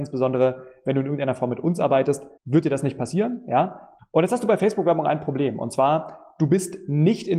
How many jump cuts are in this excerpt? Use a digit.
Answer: 2